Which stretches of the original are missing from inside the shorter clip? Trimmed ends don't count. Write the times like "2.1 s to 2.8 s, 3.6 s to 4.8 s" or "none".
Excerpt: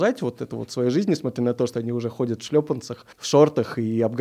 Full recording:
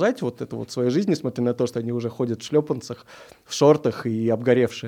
3.1 s to 3.4 s